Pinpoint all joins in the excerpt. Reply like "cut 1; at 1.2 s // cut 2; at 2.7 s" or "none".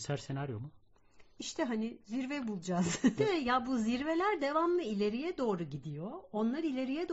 cut 1; at 3.2 s